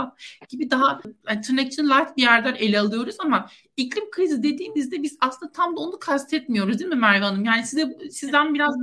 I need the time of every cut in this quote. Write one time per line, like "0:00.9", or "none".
none